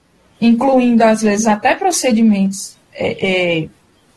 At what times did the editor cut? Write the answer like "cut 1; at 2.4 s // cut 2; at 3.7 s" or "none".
none